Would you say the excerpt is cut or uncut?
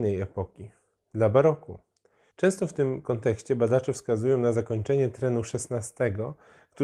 cut